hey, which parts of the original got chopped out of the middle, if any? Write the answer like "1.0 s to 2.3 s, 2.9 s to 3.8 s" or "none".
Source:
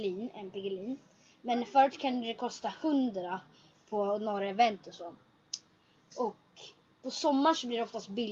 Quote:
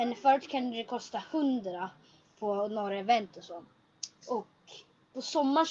5.7 s to 6.1 s